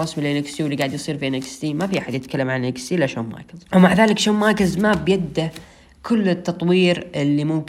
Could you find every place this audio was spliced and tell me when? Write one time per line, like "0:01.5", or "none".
0:03.7

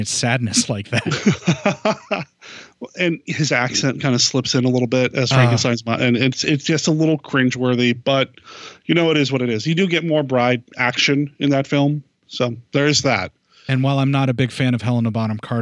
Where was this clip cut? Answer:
none

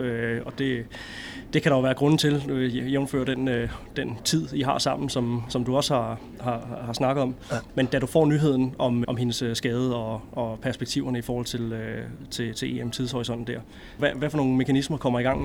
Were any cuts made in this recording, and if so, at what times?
0:09.0
0:14.0

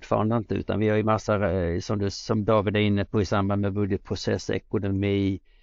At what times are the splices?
none

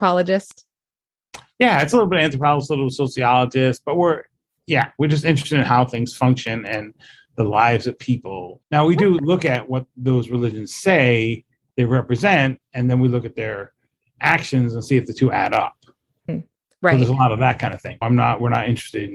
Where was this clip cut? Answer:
0:08.6

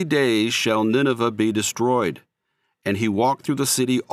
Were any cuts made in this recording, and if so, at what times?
none

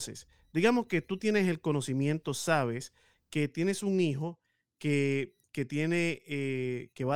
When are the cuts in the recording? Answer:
none

